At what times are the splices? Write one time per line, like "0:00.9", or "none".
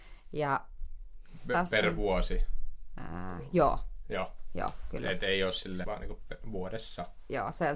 0:05.8